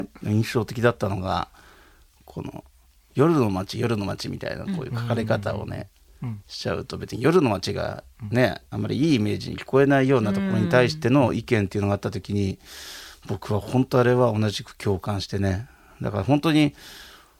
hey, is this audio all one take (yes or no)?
yes